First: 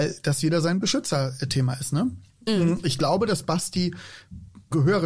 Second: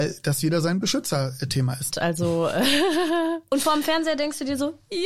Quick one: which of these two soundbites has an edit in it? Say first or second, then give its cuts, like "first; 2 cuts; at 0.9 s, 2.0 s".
second; 1 cut; at 1.9 s